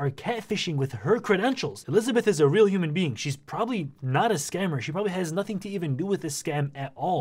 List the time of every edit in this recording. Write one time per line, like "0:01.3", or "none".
none